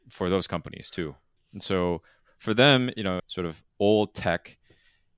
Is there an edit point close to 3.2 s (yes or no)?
yes